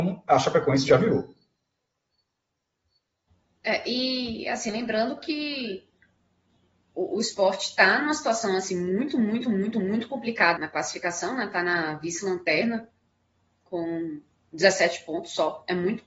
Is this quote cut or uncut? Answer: cut